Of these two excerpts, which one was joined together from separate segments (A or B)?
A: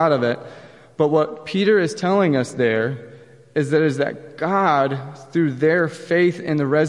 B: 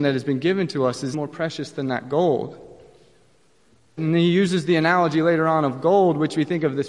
B